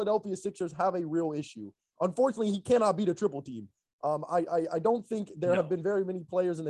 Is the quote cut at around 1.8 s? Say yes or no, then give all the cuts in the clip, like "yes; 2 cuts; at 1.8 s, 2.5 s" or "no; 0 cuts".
yes; 1 cut; at 1.8 s